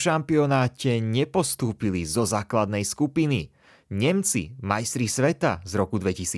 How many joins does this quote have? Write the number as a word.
zero